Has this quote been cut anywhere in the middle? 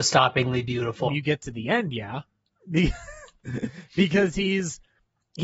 yes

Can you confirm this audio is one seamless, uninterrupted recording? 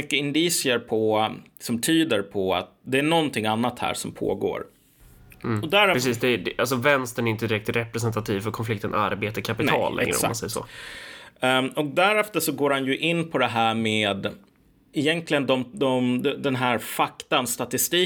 no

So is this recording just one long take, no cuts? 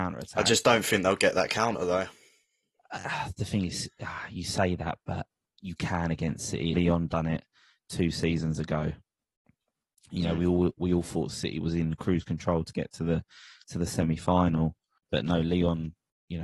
no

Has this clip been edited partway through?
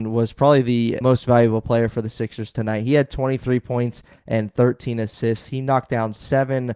yes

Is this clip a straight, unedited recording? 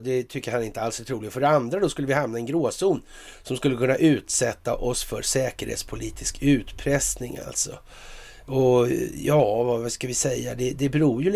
yes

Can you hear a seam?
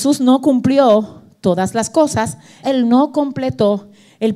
yes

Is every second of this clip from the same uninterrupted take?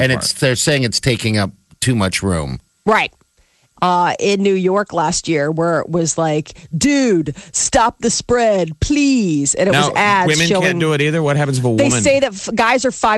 no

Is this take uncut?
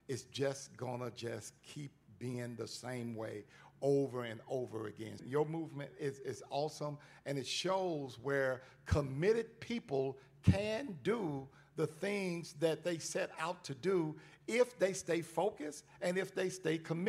no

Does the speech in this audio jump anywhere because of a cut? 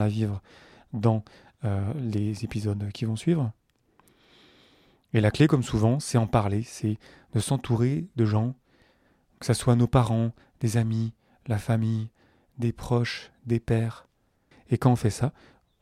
yes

